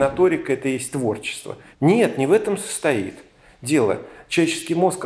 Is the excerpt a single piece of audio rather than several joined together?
no; 1 cut; at 1.7 s

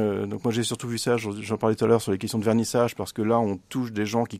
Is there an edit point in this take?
no; 0 cuts

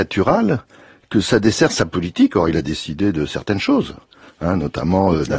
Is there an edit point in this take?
no; 0 cuts

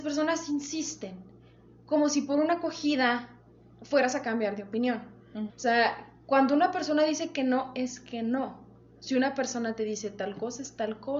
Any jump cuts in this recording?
yes; 1 cut; at 5.5 s

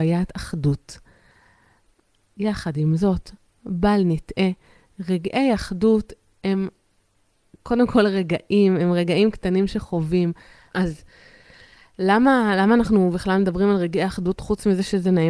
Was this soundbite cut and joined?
yes; 1 cut; at 10.7 s

